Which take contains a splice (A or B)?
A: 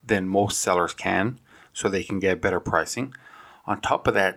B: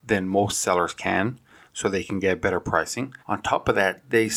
B